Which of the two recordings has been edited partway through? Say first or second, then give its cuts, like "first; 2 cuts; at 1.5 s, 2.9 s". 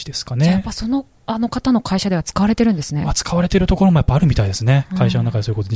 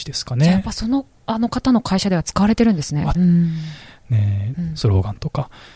second; 2 cuts; at 3.1 s, 4.5 s